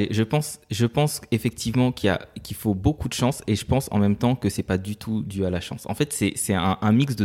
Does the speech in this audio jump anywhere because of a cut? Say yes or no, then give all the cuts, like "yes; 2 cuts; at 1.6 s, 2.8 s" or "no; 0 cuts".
no; 0 cuts